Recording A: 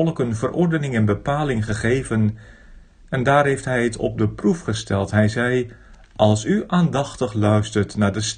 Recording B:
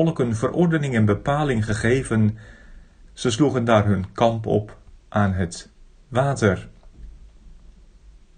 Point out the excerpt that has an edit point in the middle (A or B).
B